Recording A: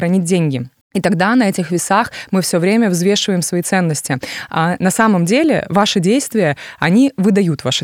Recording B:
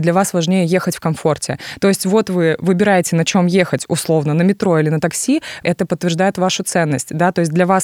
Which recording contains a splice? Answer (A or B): B